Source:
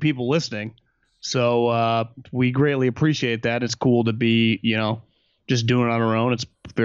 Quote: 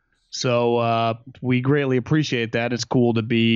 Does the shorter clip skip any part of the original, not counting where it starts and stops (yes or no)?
no